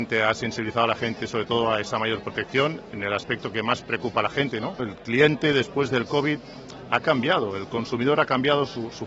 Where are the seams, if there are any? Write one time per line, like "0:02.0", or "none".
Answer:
0:04.8